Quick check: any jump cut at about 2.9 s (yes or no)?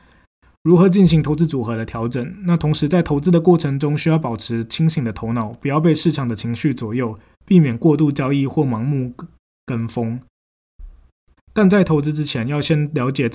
no